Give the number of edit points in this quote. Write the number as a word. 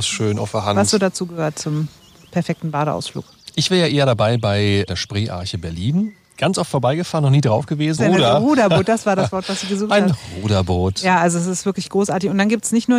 one